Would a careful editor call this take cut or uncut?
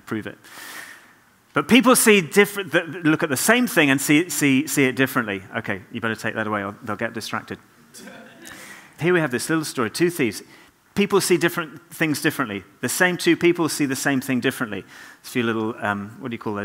cut